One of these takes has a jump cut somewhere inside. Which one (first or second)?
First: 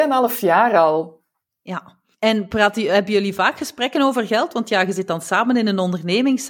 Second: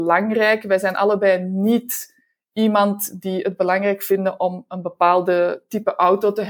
first